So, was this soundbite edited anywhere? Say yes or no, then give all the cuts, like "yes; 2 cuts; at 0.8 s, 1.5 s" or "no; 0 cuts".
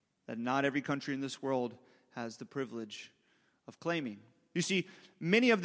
yes; 1 cut; at 4.5 s